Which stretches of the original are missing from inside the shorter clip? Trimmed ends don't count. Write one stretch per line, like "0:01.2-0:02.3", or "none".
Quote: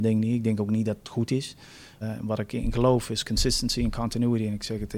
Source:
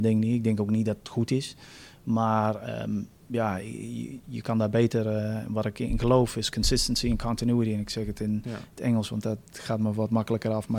0:02.0-0:05.3

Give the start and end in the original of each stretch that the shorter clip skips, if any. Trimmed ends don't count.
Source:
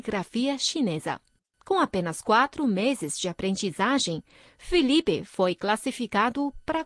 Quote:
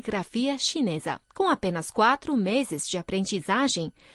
0:01.3-0:01.6

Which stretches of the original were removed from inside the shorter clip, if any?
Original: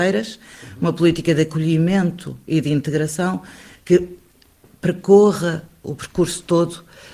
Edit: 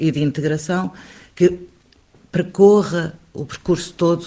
none

